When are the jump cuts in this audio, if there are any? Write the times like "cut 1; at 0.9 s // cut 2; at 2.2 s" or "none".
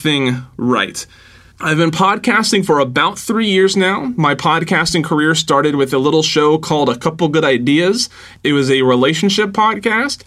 none